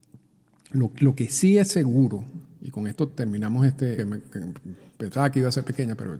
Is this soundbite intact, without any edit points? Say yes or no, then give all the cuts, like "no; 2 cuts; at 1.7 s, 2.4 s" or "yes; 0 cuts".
no; 1 cut; at 4.0 s